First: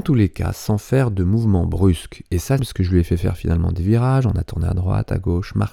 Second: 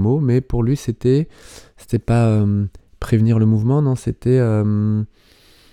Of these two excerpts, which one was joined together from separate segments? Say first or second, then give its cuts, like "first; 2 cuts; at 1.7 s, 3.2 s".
first; 1 cut; at 2.6 s